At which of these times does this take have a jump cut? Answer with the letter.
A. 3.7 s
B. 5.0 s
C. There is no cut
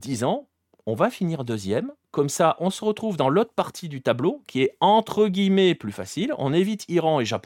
C